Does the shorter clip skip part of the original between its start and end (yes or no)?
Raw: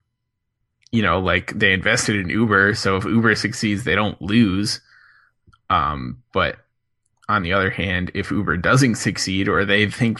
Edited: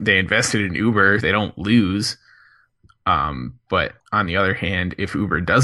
yes